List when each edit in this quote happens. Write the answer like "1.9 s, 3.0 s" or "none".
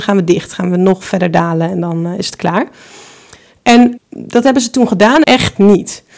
4.0 s, 5.2 s